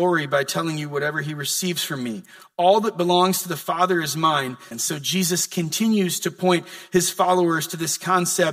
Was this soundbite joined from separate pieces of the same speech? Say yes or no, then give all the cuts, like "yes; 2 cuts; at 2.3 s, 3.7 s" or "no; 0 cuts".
yes; 1 cut; at 4.7 s